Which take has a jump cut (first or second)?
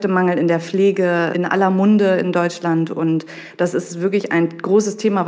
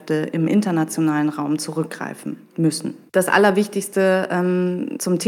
second